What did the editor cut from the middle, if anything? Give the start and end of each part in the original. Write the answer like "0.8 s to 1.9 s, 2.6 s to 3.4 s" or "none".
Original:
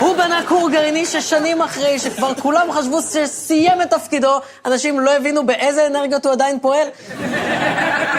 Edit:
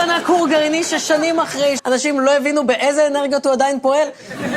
2.0 s to 4.6 s